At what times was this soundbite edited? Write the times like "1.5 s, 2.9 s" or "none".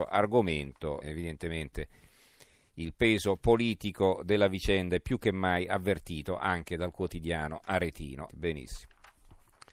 1.0 s, 8.3 s